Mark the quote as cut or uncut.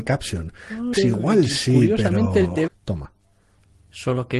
cut